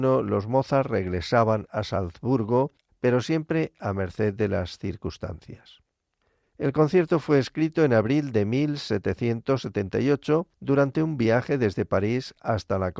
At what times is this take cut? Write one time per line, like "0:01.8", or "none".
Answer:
0:02.9
0:06.4
0:10.5

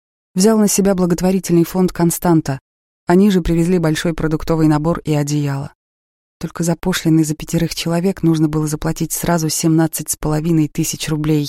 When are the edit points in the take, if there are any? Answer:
none

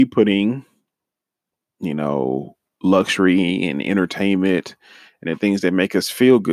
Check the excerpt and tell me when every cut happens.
0:02.7

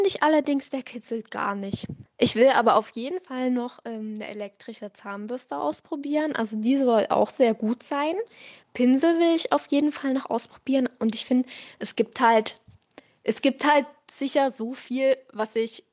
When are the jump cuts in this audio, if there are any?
0:02.1

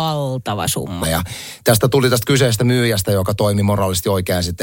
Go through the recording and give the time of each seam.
0:01.0

